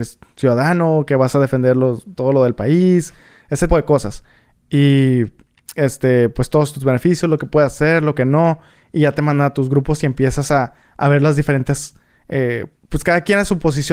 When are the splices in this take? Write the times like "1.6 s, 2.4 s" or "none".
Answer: 3.7 s